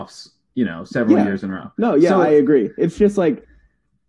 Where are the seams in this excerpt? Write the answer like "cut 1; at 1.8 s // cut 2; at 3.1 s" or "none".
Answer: none